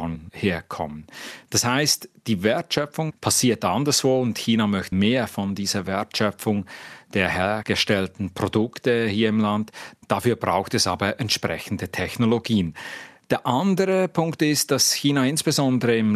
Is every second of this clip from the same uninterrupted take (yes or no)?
no